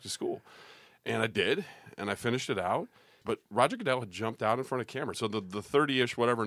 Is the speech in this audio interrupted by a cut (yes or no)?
yes